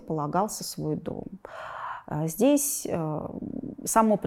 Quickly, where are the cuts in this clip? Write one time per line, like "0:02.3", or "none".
none